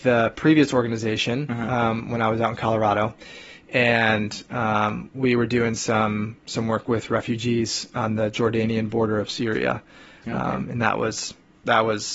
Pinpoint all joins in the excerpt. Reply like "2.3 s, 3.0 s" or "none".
none